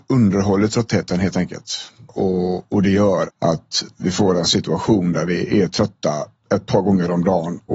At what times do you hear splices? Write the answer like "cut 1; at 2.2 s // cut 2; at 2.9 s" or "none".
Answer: cut 1; at 2.1 s // cut 2; at 3.2 s